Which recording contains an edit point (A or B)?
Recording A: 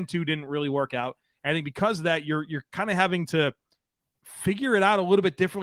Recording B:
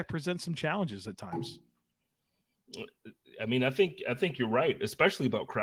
A